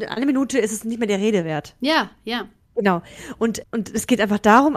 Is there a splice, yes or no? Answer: yes